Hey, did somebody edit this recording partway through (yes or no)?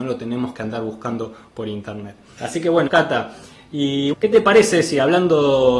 yes